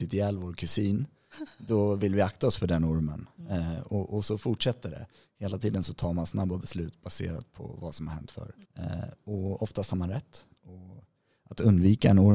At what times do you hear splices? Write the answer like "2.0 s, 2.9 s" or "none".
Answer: 8.6 s